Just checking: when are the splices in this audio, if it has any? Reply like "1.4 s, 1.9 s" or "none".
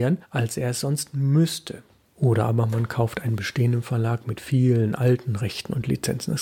2.1 s